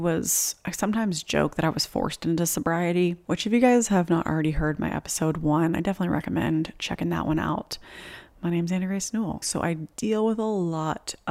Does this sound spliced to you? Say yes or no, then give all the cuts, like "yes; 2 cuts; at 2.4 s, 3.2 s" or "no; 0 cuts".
yes; 1 cut; at 9.4 s